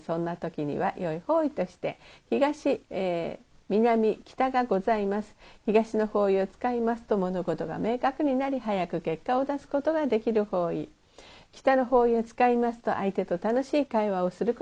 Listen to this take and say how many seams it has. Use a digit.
1